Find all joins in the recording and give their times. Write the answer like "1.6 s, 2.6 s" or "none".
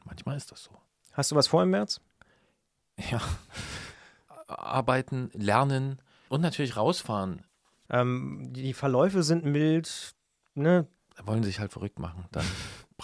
7.9 s, 11.0 s